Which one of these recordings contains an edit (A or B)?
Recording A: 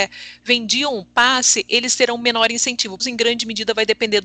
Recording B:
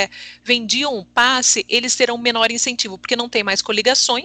A